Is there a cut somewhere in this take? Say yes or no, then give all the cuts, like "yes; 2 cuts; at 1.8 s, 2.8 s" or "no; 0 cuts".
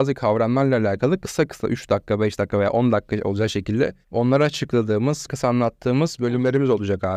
yes; 2 cuts; at 4.0 s, 5.3 s